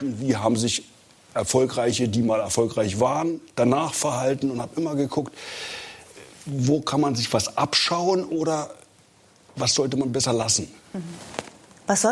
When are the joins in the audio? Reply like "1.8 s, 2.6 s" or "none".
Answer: none